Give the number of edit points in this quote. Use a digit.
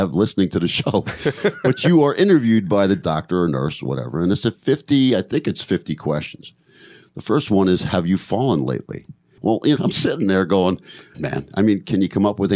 2